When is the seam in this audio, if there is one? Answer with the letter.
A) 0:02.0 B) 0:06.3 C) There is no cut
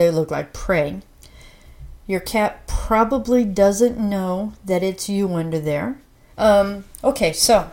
B